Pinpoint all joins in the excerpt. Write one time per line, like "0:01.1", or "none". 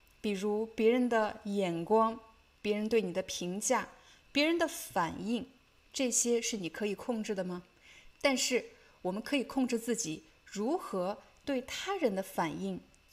0:08.1